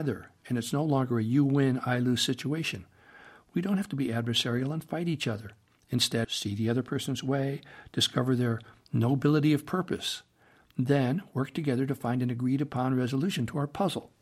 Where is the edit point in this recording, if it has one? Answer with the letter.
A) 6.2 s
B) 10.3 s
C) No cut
A